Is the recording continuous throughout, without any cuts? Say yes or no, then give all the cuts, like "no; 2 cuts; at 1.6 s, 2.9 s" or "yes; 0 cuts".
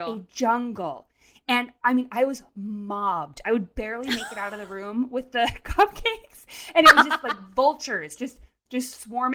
yes; 0 cuts